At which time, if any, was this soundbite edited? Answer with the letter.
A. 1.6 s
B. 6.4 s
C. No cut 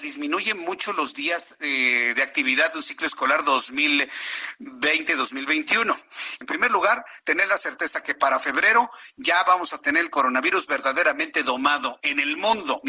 B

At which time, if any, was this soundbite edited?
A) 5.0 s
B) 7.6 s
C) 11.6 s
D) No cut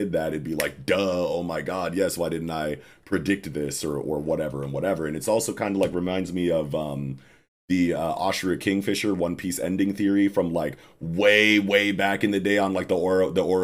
D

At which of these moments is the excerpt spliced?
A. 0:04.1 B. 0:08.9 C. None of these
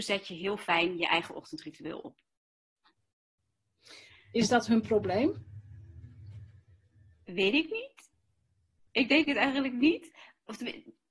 A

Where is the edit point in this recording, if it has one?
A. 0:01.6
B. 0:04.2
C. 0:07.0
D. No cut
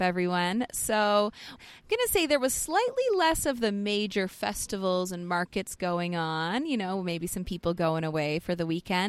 A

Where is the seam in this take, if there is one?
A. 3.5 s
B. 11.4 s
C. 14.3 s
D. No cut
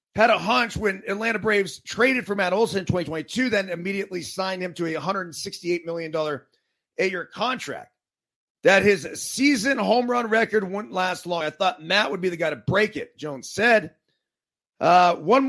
D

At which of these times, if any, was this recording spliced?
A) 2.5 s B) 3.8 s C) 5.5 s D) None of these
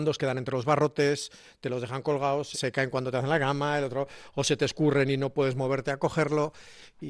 A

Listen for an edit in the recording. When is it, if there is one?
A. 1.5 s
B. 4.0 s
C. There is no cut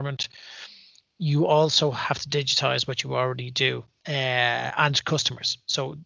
B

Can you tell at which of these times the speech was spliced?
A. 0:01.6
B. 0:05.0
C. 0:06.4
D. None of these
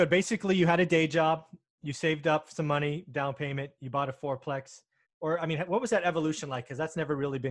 B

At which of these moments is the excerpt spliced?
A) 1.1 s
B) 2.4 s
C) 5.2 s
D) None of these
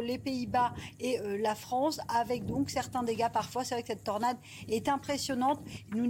D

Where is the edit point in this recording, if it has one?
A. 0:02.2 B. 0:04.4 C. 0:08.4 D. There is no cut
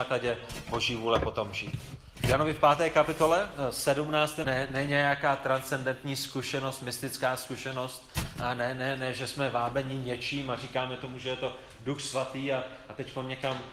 B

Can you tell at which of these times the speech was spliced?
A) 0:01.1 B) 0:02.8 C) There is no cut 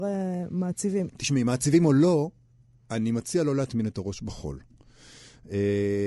A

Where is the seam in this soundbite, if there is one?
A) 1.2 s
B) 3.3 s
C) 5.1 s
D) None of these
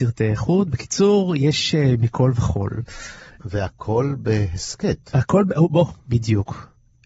D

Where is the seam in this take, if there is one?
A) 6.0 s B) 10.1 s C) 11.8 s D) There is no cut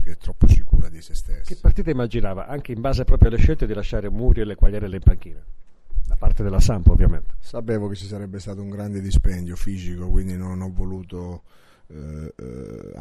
D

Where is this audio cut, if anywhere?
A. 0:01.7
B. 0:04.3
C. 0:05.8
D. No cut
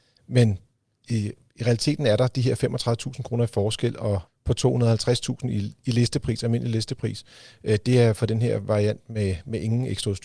B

